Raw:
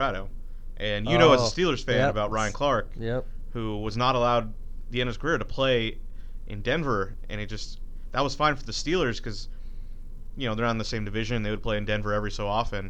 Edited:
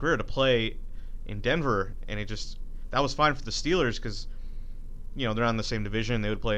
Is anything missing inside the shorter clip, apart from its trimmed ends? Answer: no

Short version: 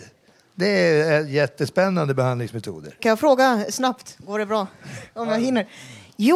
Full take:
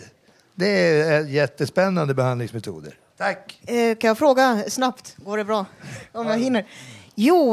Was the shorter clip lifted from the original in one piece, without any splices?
no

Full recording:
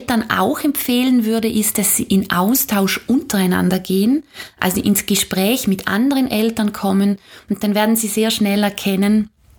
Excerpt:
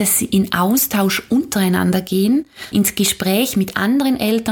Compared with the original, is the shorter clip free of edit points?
no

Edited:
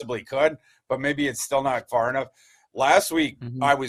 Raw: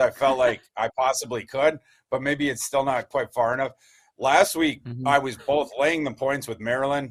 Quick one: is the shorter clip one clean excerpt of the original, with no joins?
no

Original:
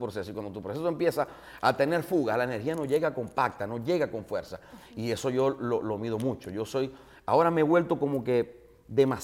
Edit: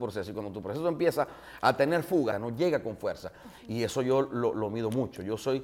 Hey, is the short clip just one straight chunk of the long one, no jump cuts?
no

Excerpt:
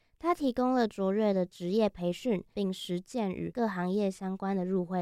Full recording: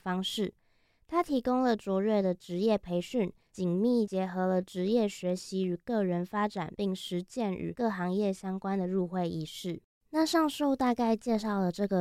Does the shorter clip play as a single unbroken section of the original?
no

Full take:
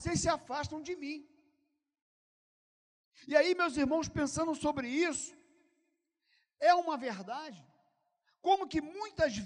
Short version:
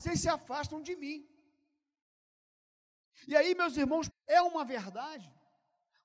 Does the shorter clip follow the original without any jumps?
no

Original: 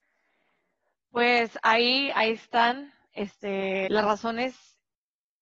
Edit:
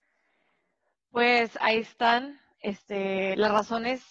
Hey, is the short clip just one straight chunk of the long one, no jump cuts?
no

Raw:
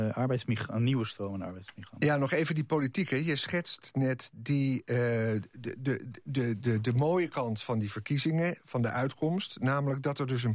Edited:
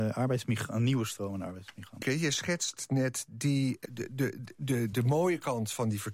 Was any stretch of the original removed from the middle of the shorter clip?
yes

